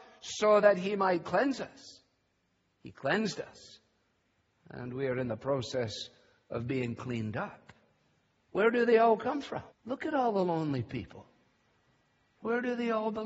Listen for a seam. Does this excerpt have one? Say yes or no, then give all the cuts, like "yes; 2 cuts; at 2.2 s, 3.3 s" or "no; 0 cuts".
yes; 2 cuts; at 8.4 s, 9.7 s